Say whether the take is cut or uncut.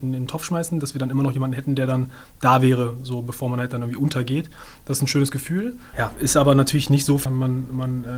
cut